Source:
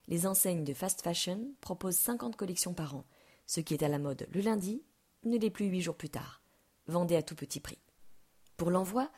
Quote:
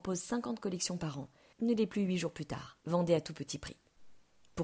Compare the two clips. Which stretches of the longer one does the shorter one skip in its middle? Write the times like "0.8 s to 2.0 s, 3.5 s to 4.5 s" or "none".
3.3 s to 5.2 s, 6.4 s to 6.8 s